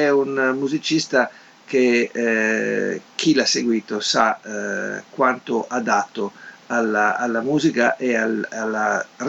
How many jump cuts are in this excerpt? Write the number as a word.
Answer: zero